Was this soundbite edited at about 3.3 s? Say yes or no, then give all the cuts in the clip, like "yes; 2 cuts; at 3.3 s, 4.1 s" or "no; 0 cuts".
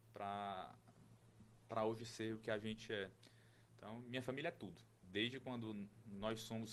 no; 1 cut; at 5.0 s